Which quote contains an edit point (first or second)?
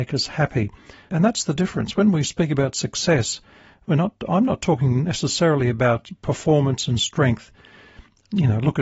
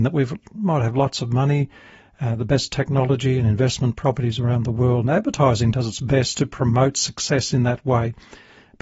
first